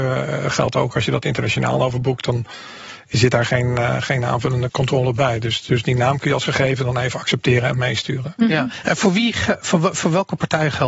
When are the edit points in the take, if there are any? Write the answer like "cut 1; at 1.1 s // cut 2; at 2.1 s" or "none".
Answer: cut 1; at 4.7 s